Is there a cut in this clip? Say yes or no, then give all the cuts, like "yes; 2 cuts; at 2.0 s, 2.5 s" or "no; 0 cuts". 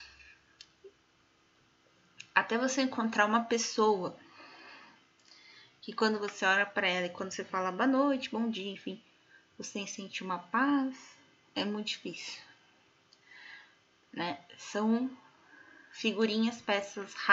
no; 0 cuts